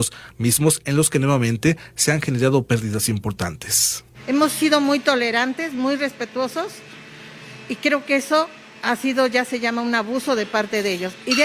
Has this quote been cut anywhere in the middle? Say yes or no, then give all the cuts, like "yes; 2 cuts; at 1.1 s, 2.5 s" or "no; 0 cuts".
no; 0 cuts